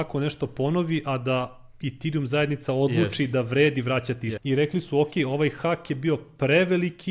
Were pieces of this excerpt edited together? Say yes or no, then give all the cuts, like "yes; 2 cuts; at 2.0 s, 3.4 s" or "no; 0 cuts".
yes; 1 cut; at 4.4 s